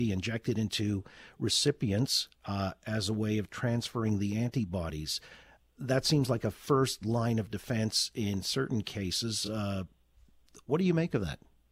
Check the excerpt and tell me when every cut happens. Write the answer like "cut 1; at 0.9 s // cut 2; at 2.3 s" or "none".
none